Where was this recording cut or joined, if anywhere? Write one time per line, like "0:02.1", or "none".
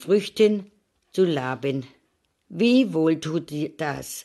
0:02.4